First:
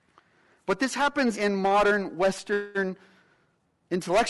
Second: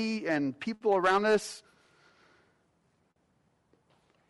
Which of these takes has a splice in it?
first; 1 cut; at 1.3 s

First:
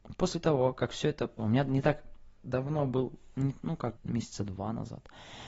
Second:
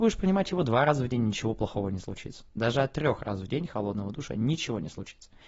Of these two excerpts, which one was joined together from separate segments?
first; 2 cuts; at 1.4 s, 4.0 s

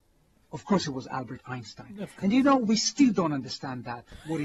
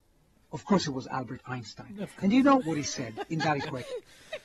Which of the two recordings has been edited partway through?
second; 1 cut; at 2.6 s

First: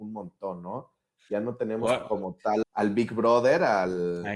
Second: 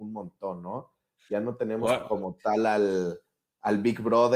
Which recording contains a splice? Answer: first; 1 cut; at 2.6 s

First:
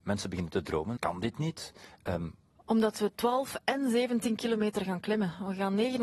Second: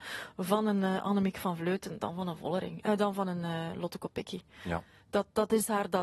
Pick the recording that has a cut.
first; 2 cuts; at 1.0 s, 2.5 s

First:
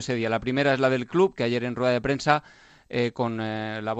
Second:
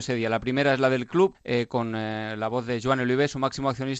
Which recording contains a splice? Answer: second; 1 cut; at 1.3 s

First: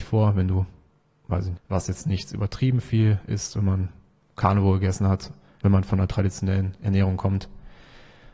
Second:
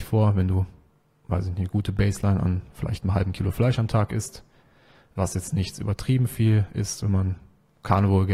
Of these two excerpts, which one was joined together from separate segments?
first; 2 cuts; at 1.6 s, 5.6 s

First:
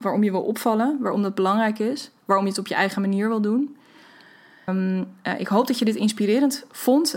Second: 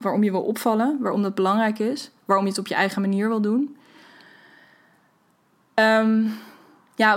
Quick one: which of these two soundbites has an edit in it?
first; 1 cut; at 4.7 s

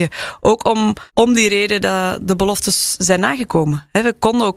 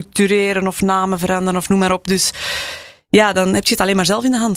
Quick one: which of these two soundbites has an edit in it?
first; 1 cut; at 1.1 s

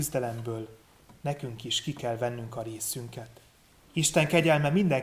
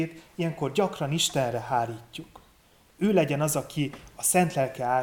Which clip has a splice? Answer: first; 1 cut; at 3.7 s

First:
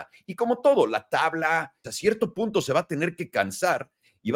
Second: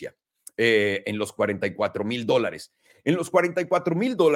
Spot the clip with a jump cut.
first; 1 cut; at 1.8 s

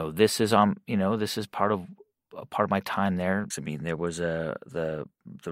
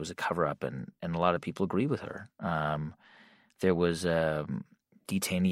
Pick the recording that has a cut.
first; 1 cut; at 3.5 s

